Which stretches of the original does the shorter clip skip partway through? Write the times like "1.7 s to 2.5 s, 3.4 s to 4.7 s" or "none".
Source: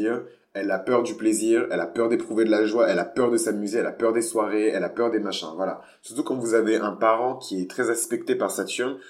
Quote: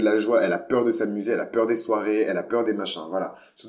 none